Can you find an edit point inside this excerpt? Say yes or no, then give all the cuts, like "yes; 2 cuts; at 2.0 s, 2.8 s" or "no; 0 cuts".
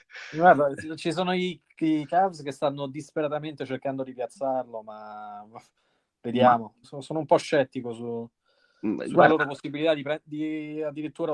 yes; 1 cut; at 6.8 s